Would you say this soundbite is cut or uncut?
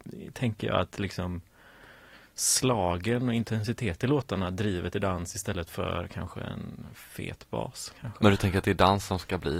uncut